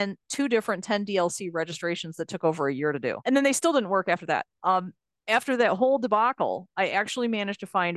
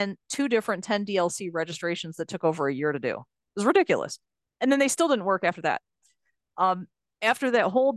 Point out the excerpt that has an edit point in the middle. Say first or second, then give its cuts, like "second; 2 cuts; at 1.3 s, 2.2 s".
first; 2 cuts; at 3.2 s, 4.5 s